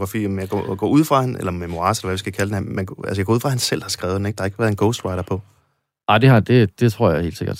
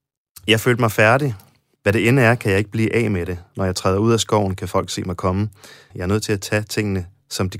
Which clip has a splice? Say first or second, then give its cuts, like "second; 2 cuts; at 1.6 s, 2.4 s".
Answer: second; 2 cuts; at 1.8 s, 5.9 s